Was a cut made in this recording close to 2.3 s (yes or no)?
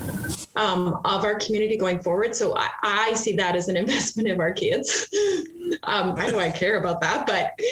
no